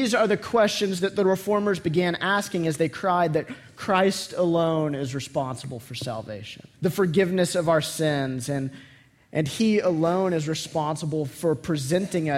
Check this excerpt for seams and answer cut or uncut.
cut